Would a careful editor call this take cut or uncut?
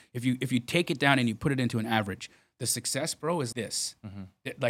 cut